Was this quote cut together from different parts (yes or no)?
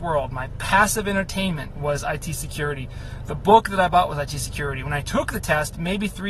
no